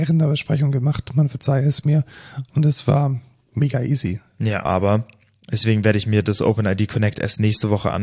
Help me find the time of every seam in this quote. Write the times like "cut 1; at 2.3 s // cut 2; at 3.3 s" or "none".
cut 1; at 4.7 s